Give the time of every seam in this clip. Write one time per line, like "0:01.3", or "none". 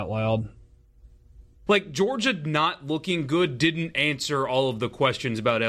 0:01.7